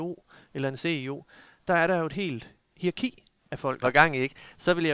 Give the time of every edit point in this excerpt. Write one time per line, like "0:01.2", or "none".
0:03.8